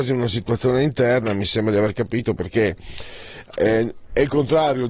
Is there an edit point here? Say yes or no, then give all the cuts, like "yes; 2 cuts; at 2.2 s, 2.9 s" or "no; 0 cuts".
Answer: no; 0 cuts